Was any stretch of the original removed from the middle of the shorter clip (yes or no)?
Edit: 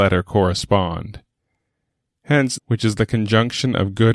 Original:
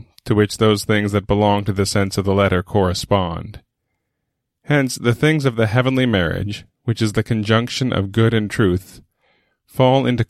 yes